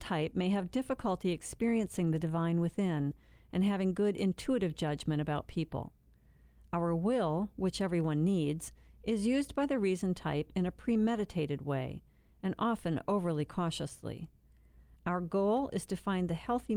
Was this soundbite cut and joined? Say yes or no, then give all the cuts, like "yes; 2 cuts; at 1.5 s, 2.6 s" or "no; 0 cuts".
no; 0 cuts